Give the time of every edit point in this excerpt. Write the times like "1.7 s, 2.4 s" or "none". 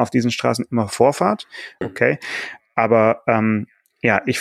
1.8 s